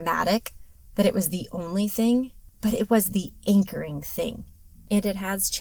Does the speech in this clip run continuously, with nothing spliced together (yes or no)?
yes